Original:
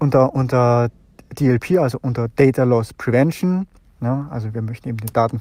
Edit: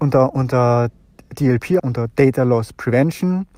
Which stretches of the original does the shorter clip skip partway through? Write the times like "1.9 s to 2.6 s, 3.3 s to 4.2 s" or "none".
1.8 s to 2.0 s